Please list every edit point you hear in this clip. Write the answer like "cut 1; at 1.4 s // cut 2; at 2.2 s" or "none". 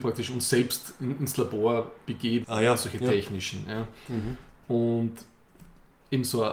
cut 1; at 2.4 s